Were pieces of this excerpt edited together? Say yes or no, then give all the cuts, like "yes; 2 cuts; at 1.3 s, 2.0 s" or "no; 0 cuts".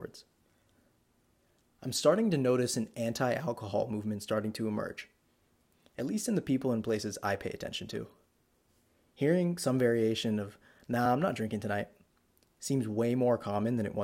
no; 0 cuts